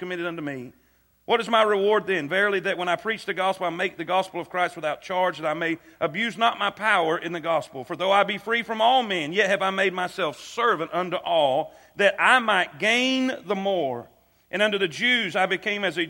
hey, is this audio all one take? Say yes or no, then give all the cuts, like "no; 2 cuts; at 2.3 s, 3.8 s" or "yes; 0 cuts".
yes; 0 cuts